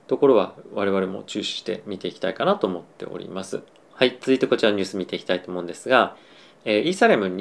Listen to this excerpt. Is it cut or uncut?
uncut